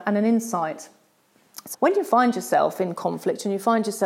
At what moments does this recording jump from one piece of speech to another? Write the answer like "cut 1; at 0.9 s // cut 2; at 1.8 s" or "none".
cut 1; at 1.7 s

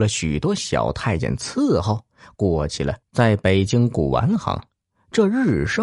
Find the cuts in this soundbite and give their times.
cut 1; at 3.0 s

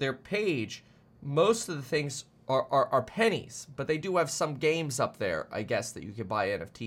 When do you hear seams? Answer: none

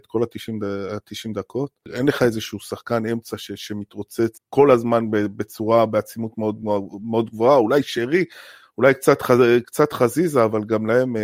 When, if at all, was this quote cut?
none

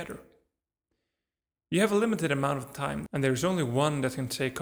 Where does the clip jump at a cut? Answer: cut 1; at 3.1 s

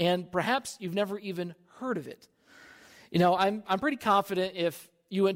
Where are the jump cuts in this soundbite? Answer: none

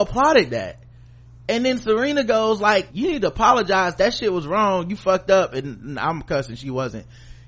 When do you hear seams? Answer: cut 1; at 2.9 s

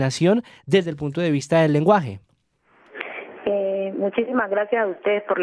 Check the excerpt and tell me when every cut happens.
none

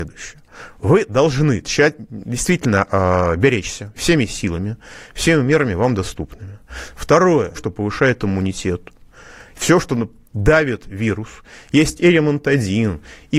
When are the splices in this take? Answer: cut 1; at 3.9 s // cut 2; at 7.5 s

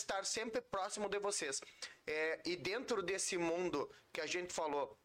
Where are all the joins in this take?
none

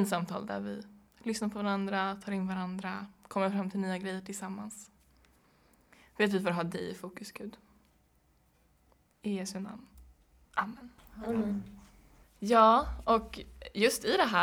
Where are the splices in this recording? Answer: none

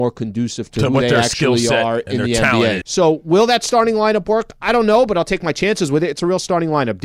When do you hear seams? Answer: cut 1; at 2.8 s

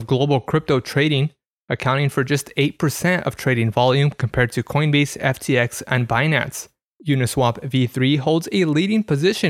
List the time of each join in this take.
none

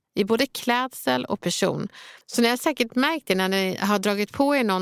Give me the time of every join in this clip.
cut 1; at 2.2 s

